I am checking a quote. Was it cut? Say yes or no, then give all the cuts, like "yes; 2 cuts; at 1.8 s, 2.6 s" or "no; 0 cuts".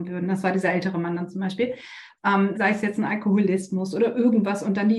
yes; 1 cut; at 2.5 s